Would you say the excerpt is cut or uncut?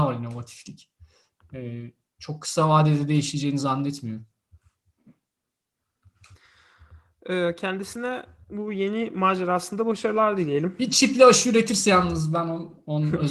uncut